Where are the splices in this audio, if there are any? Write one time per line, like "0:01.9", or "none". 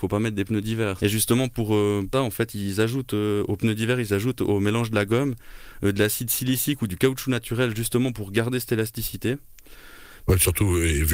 0:01.0
0:02.1
0:10.2